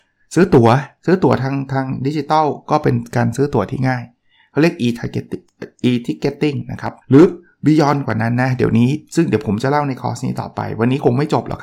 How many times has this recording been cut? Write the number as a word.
one